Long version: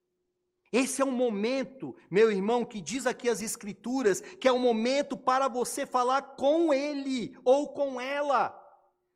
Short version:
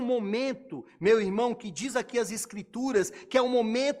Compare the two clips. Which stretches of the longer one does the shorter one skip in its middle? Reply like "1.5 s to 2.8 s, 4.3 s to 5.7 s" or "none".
none